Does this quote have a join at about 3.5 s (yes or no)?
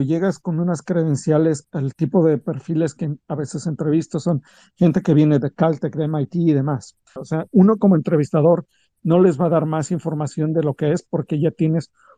no